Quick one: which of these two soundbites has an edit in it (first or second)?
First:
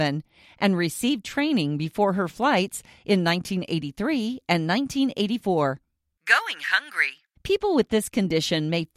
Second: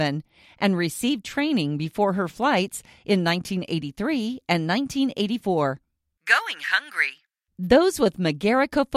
first